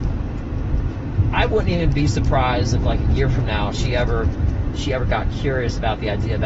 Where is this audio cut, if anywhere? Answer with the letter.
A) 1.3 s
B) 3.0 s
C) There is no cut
C